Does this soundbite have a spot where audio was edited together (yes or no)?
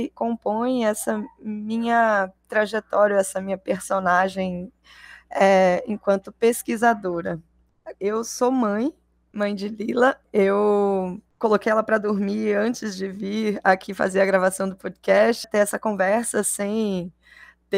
yes